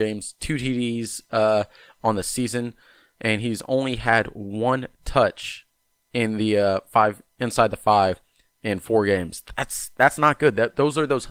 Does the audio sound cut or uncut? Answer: uncut